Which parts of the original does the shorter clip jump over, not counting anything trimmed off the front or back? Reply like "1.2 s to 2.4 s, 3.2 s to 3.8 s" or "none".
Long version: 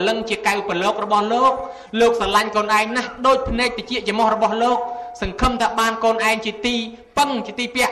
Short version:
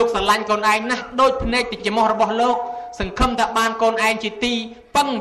3.9 s to 4.0 s